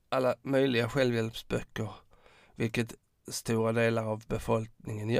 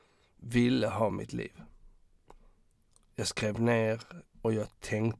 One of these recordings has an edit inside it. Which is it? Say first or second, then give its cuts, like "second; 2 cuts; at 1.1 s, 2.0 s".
second; 1 cut; at 4.2 s